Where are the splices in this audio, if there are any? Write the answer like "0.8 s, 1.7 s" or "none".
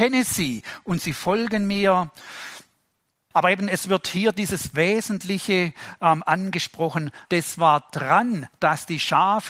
3.3 s, 7.2 s